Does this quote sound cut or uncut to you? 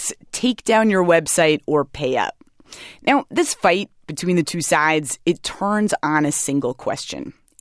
uncut